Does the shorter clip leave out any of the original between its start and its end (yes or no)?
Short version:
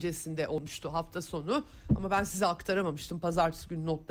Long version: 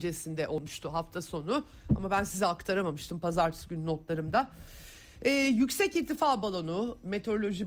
no